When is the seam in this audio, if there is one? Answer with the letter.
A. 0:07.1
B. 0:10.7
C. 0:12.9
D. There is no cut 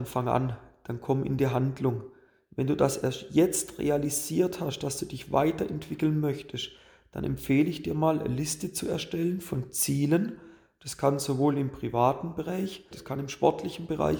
C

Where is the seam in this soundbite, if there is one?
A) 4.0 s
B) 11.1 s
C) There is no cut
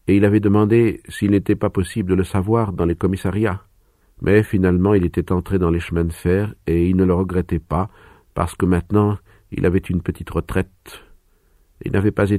A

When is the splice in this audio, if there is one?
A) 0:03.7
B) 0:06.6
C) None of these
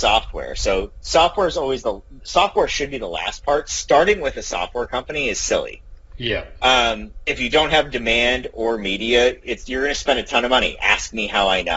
C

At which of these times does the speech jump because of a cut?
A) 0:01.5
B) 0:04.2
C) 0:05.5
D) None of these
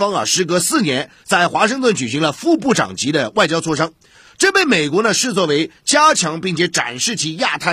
D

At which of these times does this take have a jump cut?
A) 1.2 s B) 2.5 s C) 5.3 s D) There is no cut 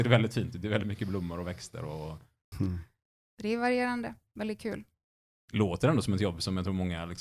B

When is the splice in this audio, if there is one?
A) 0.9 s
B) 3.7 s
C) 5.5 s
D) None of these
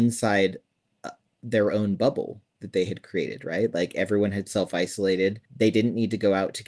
C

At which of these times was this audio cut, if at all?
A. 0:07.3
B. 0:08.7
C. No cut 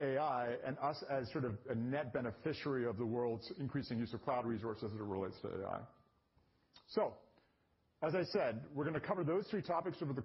C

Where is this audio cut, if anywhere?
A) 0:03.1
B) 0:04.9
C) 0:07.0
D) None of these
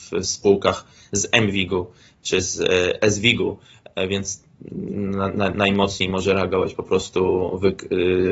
D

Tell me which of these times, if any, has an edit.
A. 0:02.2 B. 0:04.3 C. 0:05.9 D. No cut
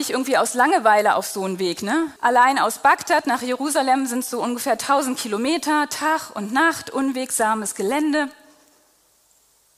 A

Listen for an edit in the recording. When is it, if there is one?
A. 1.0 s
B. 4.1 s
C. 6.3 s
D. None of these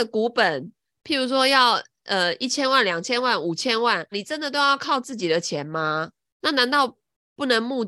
B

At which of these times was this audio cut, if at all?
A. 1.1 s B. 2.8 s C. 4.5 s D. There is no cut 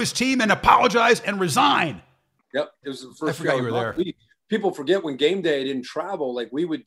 B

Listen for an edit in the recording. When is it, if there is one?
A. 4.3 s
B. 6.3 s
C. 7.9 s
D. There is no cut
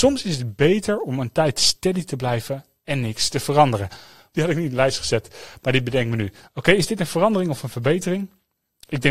A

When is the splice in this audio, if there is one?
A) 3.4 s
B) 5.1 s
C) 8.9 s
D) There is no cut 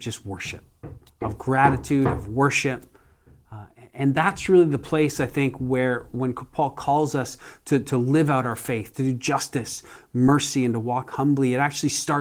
C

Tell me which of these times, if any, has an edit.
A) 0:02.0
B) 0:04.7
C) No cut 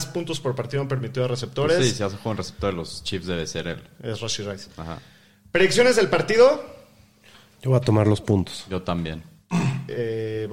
C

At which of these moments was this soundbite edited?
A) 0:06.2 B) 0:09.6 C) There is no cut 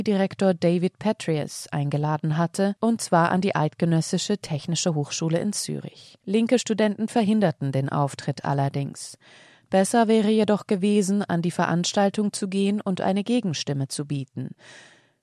C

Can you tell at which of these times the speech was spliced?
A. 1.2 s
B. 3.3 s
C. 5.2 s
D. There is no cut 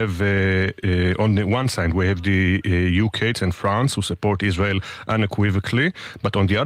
B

